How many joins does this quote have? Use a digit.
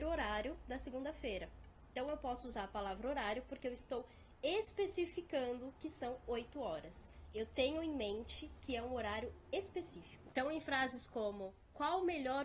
1